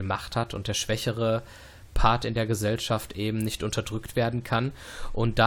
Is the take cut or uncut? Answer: uncut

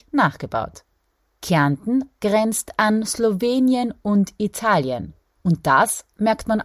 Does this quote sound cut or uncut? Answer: uncut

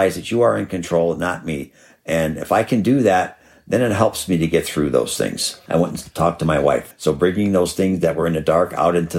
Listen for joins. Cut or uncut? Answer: cut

